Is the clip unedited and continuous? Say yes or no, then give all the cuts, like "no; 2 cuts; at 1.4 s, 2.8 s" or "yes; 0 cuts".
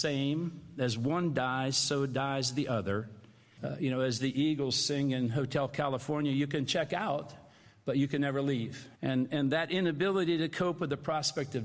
no; 2 cuts; at 3.6 s, 8.9 s